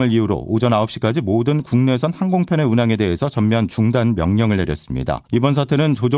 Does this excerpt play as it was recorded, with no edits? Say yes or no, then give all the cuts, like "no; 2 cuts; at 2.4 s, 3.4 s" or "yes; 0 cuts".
no; 1 cut; at 5.3 s